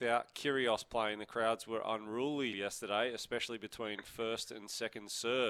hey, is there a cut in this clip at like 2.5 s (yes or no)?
yes